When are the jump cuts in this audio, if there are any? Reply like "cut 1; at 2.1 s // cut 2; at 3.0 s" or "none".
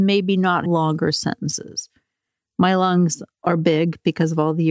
none